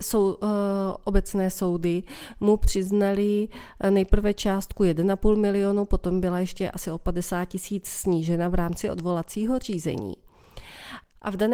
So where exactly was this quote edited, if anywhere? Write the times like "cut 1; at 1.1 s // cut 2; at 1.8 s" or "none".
none